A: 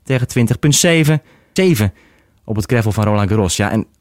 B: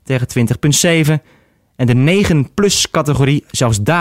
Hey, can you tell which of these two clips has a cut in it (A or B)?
A